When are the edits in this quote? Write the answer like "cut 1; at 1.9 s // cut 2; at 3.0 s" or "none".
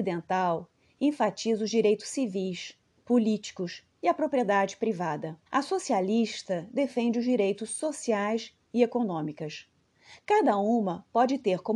cut 1; at 5.5 s